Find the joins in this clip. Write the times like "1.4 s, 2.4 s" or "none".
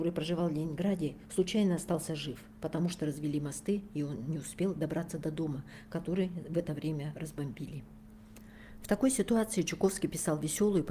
none